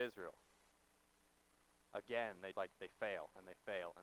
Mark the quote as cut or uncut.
cut